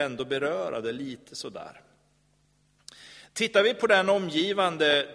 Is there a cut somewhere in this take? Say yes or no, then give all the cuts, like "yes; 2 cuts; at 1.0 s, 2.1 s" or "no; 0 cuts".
no; 0 cuts